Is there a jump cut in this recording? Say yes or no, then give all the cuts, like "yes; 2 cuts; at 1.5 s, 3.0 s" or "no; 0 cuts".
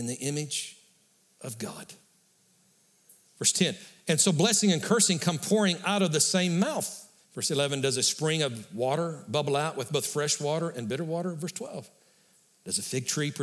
yes; 2 cuts; at 3.2 s, 7.2 s